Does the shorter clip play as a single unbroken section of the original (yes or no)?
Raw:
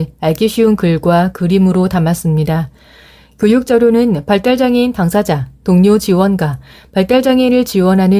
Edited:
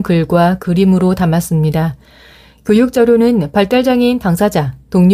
yes